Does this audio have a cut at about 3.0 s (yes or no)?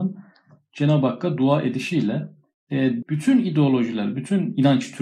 yes